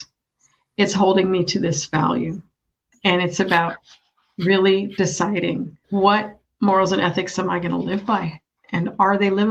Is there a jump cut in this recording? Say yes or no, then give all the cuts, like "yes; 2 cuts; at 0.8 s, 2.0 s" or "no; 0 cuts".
yes; 2 cuts; at 2.9 s, 5.8 s